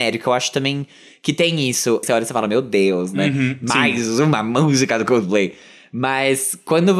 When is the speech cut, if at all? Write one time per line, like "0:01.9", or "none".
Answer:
0:02.0